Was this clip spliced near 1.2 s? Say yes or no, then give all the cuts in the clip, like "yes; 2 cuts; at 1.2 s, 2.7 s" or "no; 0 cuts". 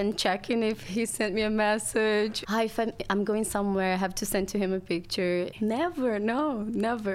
no; 2 cuts; at 2.4 s, 5.5 s